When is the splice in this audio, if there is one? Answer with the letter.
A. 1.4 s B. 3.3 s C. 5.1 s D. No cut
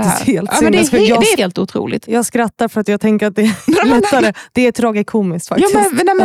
A